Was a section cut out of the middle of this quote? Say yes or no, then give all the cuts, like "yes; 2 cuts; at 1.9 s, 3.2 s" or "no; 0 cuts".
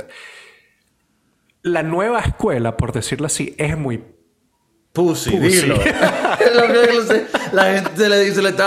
no; 0 cuts